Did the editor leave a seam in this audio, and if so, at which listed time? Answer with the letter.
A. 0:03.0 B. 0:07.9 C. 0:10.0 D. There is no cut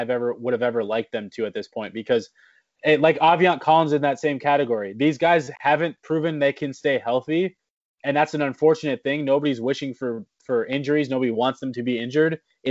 D